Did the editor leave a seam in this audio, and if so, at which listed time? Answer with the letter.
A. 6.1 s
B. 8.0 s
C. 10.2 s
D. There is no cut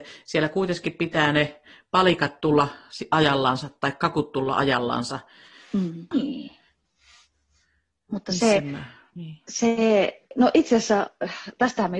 A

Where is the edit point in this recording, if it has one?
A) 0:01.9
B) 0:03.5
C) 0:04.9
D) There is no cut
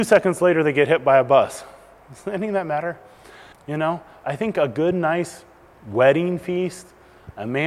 B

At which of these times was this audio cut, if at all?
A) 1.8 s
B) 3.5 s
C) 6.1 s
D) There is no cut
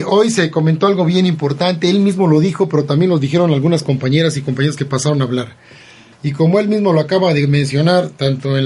C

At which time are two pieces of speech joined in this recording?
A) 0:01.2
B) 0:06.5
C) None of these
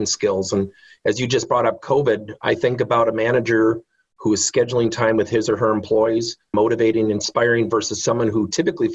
B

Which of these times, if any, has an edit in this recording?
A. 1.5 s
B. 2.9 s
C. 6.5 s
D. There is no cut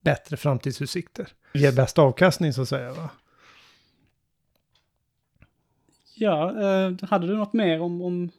A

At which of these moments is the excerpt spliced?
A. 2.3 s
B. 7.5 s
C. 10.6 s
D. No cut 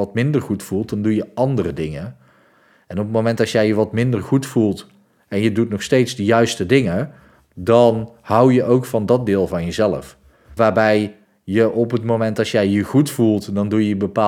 C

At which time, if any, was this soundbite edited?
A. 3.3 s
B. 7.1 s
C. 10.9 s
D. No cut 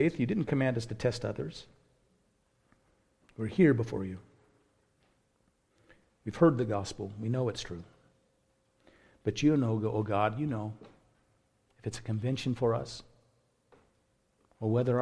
D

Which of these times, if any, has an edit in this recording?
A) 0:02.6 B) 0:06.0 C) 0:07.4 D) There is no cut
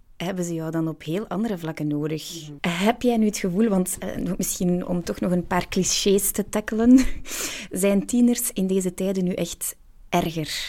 A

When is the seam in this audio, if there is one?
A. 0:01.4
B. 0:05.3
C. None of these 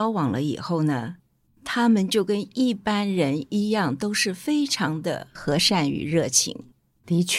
C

